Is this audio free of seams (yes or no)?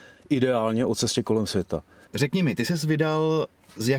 no